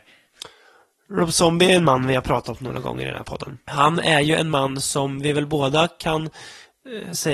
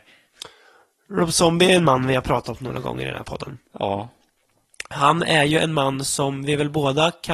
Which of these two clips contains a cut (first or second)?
first